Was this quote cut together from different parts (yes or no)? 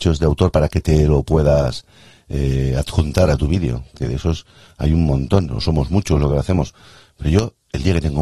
no